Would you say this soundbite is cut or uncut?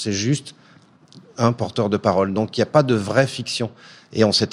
uncut